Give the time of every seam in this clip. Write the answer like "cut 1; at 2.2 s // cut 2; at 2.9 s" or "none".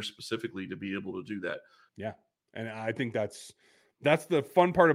cut 1; at 1.9 s